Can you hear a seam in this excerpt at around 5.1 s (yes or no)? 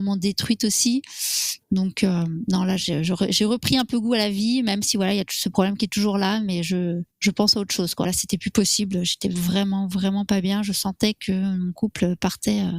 no